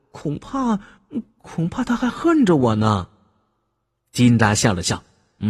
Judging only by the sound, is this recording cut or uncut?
uncut